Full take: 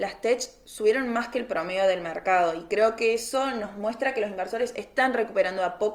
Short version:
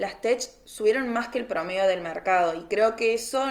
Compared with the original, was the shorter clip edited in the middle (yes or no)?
no